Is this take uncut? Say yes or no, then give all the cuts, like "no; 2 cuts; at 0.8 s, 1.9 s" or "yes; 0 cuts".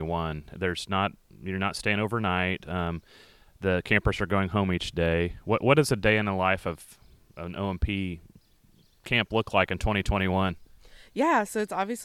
yes; 0 cuts